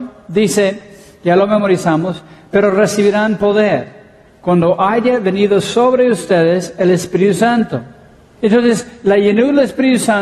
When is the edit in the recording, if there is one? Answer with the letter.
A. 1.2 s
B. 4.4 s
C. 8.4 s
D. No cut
C